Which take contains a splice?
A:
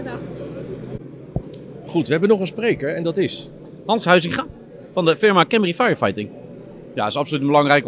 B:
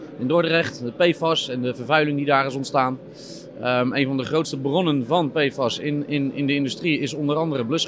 A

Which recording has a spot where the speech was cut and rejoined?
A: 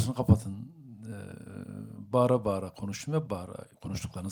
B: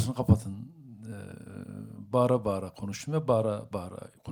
A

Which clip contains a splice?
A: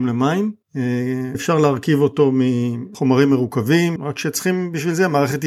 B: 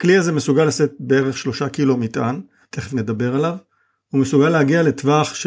A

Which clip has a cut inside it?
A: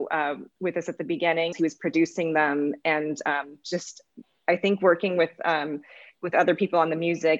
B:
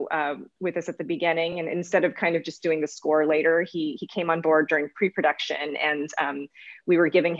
A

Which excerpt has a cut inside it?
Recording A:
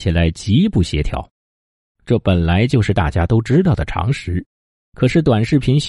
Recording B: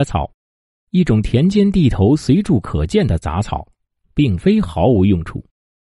A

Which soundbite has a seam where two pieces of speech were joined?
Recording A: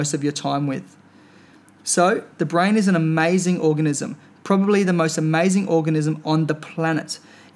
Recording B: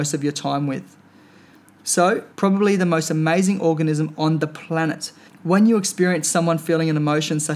B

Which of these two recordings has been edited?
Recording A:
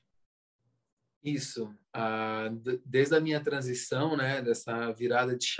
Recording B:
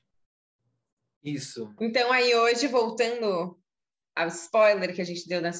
B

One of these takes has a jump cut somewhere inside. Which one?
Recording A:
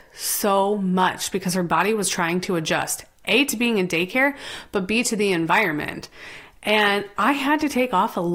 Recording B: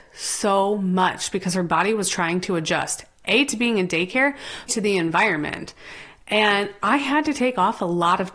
B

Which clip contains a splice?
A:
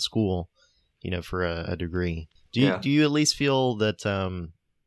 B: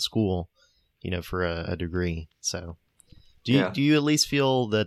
A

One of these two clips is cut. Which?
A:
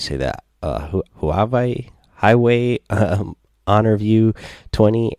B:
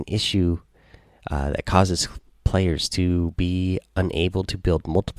A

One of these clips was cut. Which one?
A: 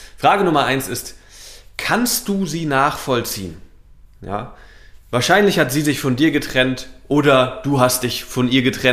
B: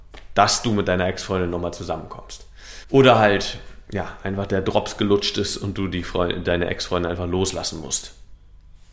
B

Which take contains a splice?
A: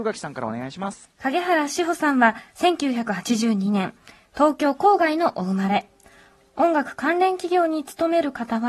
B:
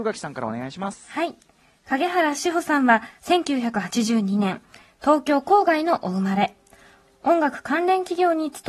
A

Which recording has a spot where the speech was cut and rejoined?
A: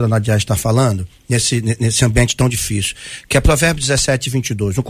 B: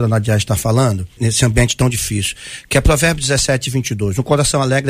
B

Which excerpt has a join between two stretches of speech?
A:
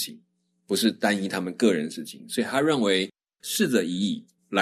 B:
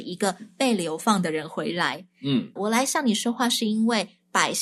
B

